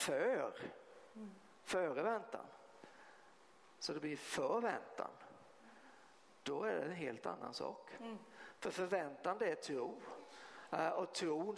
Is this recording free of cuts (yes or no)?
yes